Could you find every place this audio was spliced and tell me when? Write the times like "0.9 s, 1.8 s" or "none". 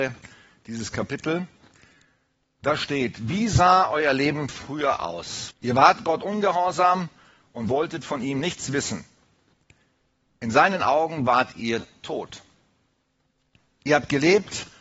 5.5 s